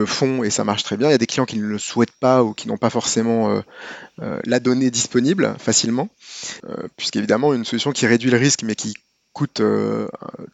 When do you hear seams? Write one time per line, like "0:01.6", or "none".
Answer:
0:06.6